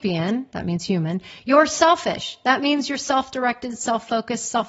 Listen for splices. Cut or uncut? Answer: uncut